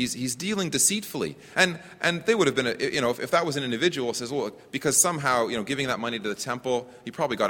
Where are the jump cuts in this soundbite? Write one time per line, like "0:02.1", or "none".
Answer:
none